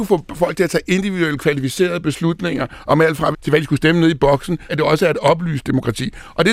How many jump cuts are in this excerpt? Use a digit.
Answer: 2